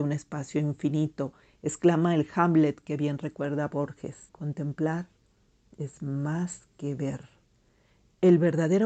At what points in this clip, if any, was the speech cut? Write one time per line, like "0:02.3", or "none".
0:04.3

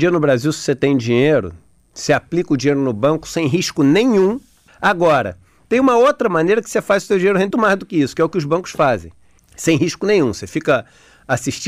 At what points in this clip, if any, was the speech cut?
0:04.7
0:07.5
0:09.4

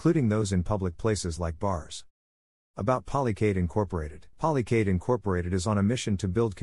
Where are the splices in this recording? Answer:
0:04.3

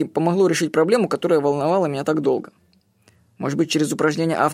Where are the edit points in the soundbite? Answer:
none

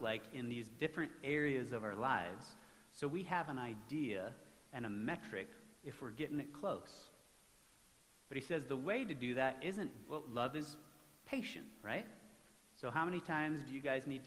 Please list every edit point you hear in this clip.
0:10.0

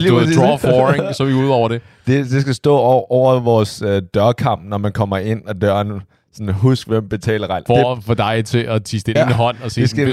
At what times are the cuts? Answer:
0:07.7
0:09.2

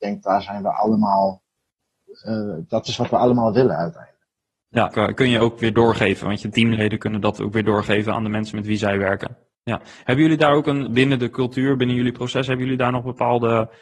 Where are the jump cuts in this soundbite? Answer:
0:04.9
0:09.5
0:10.9

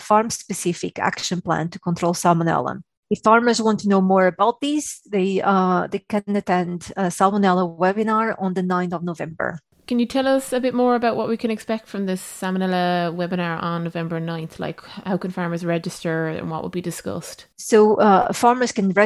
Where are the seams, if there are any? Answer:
0:17.5

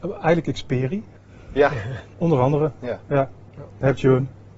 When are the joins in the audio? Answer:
0:02.1

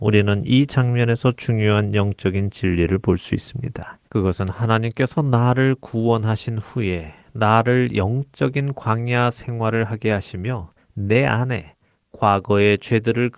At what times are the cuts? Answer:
0:04.0

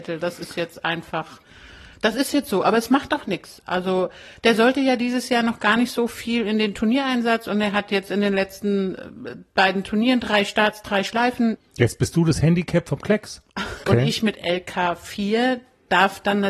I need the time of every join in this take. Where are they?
0:11.6
0:13.8

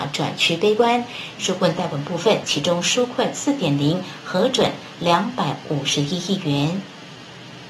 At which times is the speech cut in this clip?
0:01.4
0:02.4

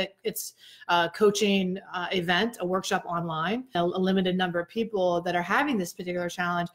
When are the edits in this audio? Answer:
0:03.8

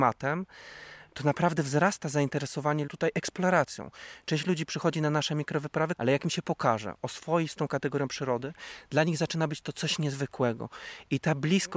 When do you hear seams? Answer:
0:05.9

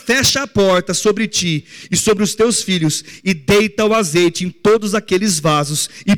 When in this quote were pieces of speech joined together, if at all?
none

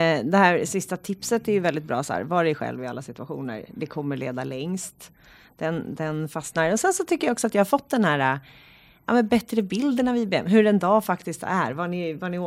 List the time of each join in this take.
none

